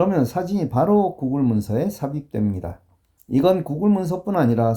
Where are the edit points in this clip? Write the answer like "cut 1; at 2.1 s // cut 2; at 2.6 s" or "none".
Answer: cut 1; at 3.2 s